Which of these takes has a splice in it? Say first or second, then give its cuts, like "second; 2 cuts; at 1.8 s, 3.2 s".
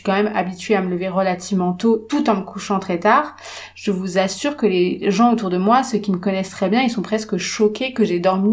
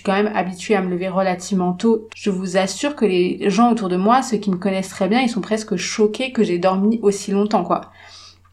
second; 1 cut; at 2.1 s